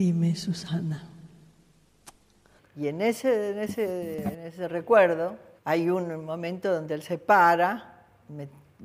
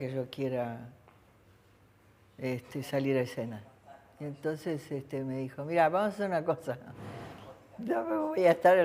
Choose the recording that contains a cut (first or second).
first